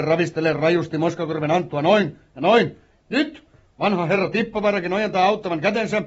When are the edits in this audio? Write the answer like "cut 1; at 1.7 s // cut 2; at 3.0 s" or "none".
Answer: cut 1; at 3.0 s